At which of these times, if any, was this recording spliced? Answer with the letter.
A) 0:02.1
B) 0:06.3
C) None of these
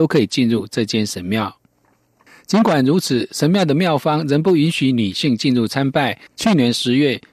B